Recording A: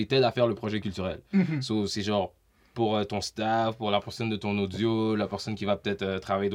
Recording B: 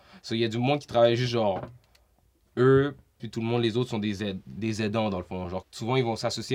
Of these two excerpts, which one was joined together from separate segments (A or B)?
B